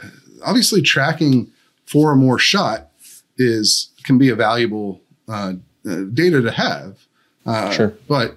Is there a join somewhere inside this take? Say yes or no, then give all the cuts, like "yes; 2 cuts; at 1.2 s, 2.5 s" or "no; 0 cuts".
no; 0 cuts